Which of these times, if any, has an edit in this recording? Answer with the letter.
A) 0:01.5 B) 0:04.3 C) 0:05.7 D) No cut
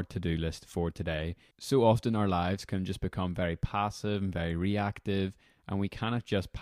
A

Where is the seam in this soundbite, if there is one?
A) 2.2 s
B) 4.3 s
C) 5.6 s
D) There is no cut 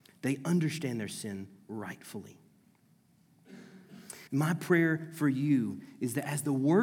B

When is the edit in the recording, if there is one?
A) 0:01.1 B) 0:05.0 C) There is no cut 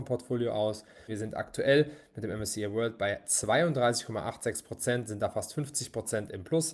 A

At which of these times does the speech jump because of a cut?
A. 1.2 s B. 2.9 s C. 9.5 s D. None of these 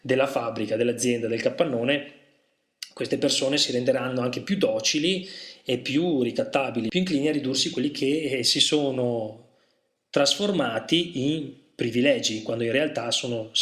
D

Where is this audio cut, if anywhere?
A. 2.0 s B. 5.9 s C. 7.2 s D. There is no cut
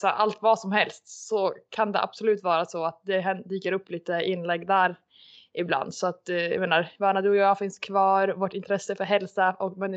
D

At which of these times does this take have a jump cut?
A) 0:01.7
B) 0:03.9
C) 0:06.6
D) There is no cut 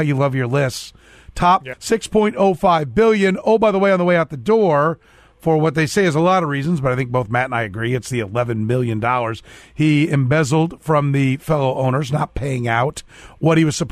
A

